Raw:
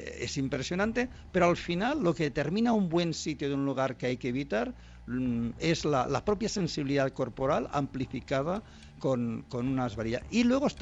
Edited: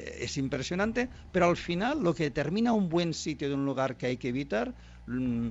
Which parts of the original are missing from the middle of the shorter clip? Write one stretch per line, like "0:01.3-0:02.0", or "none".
none